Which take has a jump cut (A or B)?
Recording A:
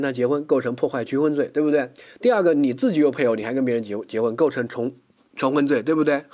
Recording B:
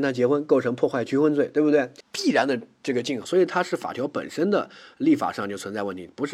B